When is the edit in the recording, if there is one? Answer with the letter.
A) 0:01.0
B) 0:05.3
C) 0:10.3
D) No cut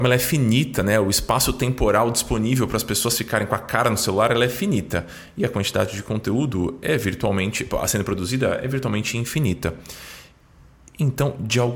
D